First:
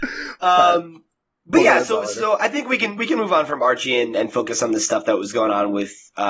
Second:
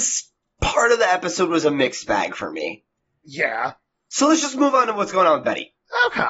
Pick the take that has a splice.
second; 1 cut; at 3.2 s

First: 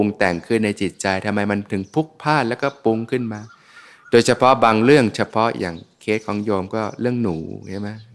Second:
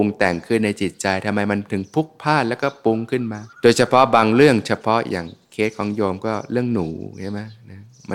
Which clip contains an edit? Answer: second; 1 cut; at 3.5 s

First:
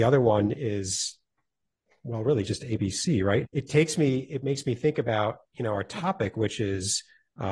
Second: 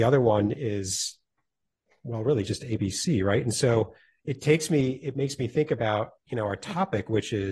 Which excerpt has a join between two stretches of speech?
first; 1 cut; at 3.4 s

